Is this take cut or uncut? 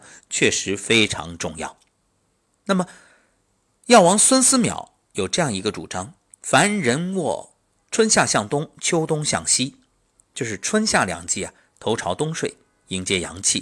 uncut